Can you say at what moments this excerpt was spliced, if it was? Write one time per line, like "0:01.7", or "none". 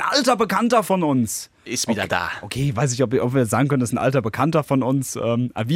none